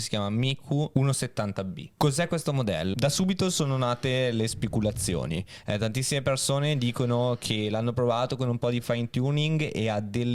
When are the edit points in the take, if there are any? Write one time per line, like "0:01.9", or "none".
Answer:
0:02.9

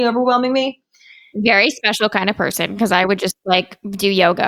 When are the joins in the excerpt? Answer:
none

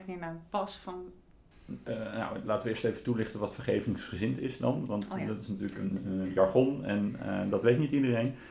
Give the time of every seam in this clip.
0:01.5

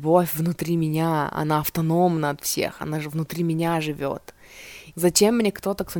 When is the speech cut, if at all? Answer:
0:04.9

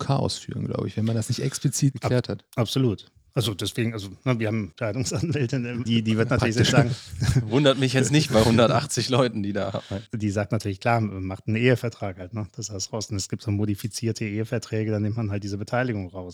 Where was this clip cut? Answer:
0:05.9
0:12.9

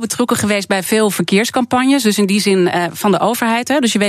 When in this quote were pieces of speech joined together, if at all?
none

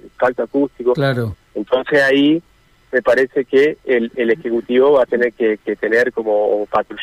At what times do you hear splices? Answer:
0:01.3

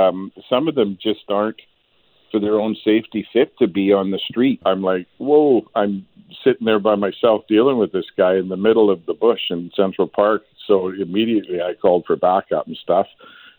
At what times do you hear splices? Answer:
0:04.6

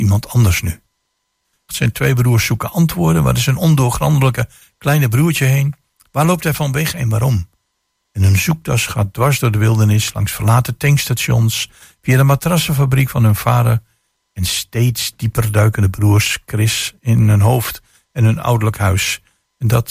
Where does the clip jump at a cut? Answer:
0:01.7

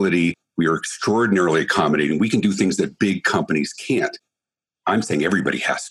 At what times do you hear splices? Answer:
none

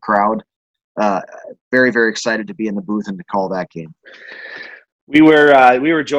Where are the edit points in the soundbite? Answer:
none

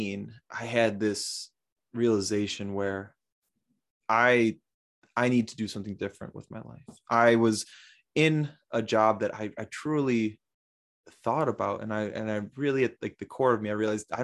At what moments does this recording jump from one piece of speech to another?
none

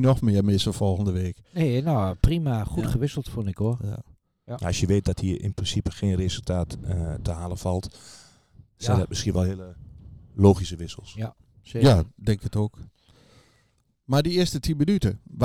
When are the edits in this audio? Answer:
none

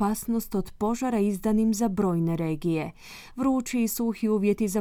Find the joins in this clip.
none

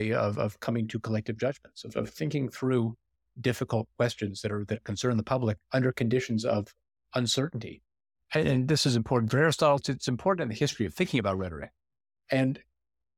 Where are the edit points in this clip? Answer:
0:05.6
0:09.8

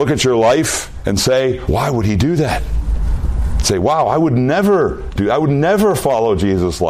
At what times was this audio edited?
0:01.7

